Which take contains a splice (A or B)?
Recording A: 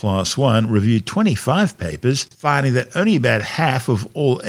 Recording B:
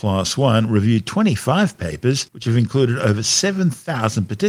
A